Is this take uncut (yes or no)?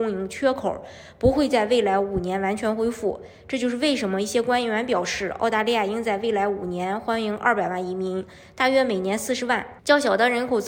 no